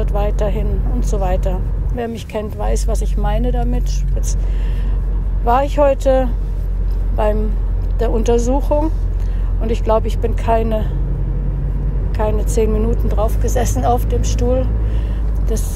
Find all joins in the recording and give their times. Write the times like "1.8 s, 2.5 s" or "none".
1.9 s, 4.1 s